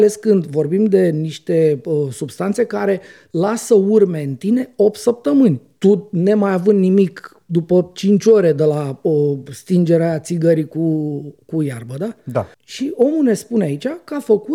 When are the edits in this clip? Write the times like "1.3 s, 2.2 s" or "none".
12.5 s